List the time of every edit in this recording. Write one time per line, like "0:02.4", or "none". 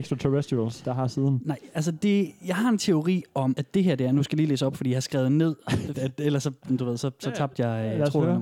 0:05.9